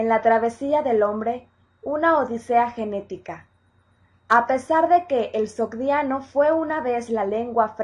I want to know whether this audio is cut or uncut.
uncut